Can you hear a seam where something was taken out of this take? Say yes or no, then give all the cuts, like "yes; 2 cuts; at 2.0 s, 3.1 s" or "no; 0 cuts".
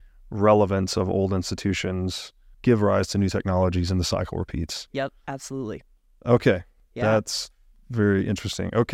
yes; 1 cut; at 2.5 s